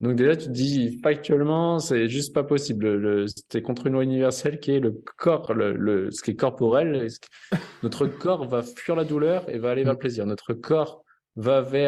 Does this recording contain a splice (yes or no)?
no